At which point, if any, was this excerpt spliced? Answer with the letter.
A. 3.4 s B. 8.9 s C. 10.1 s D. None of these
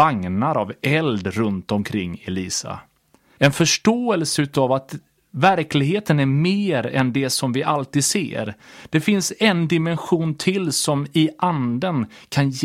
A